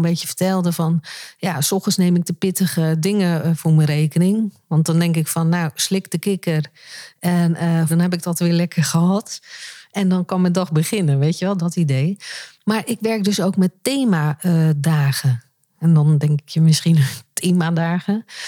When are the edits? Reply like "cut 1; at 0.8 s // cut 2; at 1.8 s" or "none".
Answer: cut 1; at 7.9 s